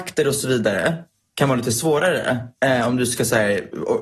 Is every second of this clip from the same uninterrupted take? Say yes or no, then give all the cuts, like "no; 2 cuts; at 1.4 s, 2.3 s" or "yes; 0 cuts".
yes; 0 cuts